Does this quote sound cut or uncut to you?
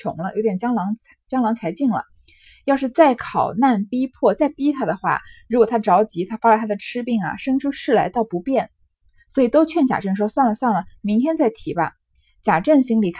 uncut